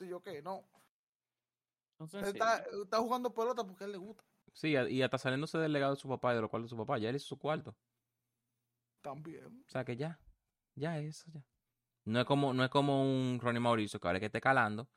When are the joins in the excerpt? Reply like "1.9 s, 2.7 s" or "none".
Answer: none